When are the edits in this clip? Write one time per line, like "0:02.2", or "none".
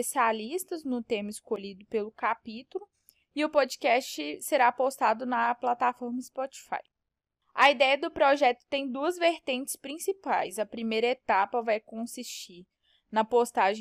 none